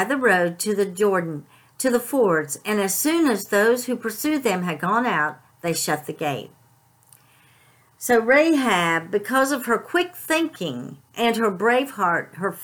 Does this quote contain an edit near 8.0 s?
no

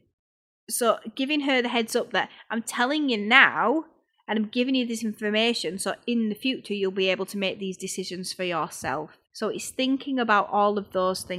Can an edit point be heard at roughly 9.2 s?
yes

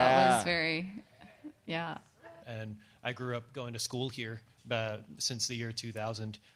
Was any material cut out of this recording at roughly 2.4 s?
yes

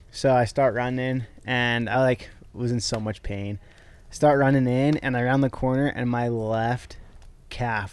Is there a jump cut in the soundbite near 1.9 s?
no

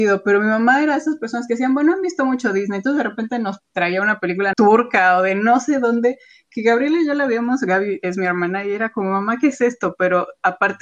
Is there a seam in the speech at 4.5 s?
yes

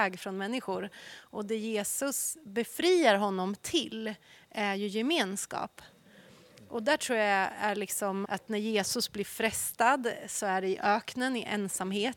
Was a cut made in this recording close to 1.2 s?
no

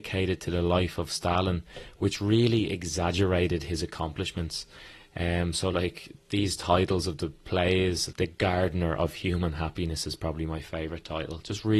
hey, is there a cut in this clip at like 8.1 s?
yes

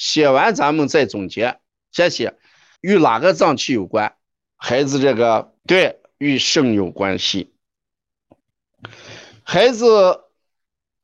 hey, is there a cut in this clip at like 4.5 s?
yes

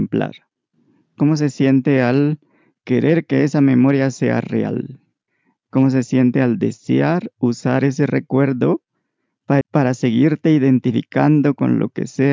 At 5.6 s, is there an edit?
no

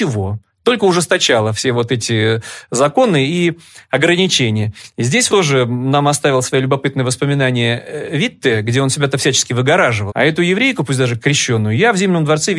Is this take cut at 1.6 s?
no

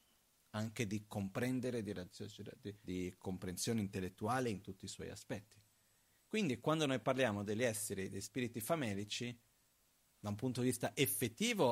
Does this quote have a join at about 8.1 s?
no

